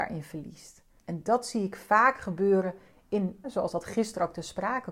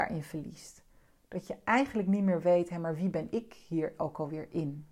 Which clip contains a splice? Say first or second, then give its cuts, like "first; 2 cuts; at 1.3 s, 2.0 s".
first; 2 cuts; at 1.0 s, 3.4 s